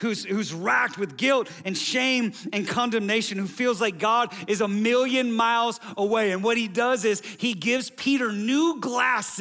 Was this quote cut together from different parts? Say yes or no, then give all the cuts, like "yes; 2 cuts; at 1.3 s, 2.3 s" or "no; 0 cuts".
no; 0 cuts